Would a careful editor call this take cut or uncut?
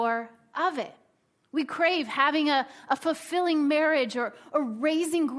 uncut